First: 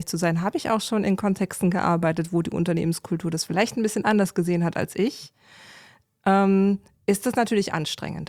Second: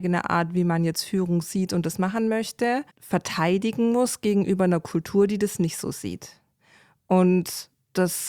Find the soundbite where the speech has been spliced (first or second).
second